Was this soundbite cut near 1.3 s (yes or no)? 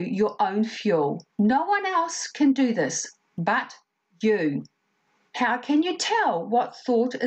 yes